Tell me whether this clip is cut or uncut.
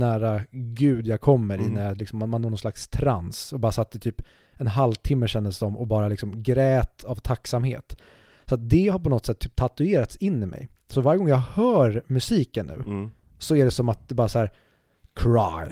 uncut